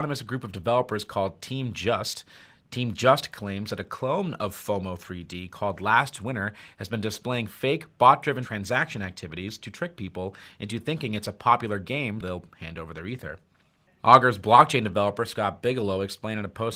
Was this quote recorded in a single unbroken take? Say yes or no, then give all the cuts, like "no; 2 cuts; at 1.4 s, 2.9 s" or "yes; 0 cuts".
no; 3 cuts; at 2.5 s, 12.2 s, 13.9 s